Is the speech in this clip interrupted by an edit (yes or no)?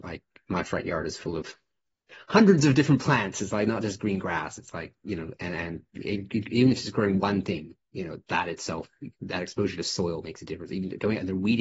no